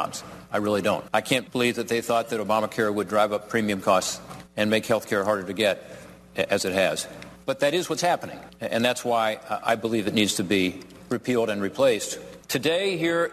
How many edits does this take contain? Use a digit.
1